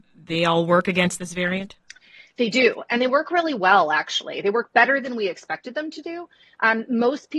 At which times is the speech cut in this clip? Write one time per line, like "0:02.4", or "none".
none